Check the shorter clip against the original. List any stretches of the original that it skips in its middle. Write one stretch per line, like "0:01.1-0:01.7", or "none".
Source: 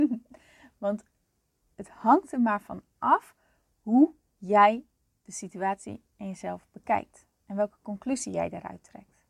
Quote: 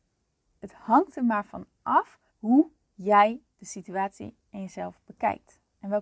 0:03.4-0:03.7
0:04.9-0:05.2